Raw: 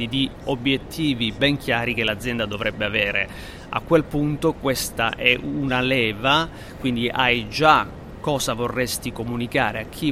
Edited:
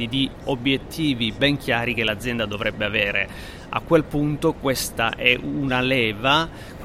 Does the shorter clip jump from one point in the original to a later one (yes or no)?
no